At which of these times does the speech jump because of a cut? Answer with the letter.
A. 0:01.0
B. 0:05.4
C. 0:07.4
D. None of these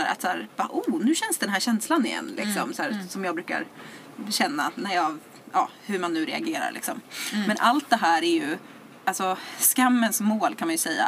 D